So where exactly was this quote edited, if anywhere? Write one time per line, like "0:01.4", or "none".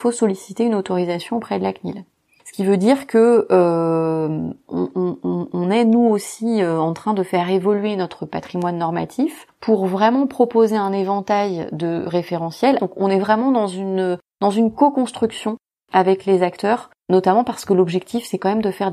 0:12.8